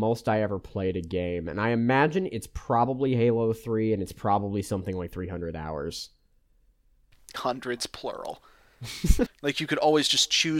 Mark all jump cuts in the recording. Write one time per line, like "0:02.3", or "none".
0:07.3
0:09.3